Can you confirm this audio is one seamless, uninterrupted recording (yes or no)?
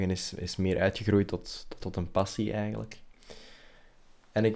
no